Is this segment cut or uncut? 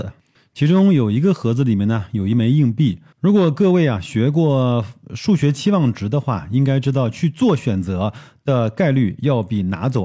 cut